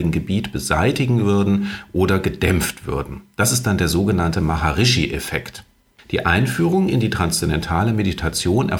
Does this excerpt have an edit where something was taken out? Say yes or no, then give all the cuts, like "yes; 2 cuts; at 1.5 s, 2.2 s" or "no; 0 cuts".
no; 0 cuts